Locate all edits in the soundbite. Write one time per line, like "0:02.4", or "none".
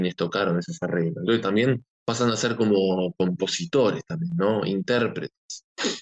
none